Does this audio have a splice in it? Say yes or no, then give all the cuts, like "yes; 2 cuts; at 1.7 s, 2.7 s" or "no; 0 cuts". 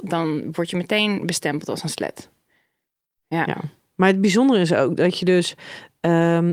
no; 0 cuts